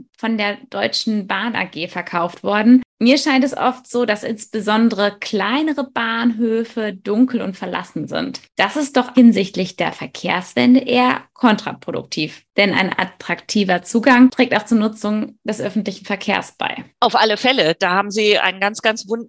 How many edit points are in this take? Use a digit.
1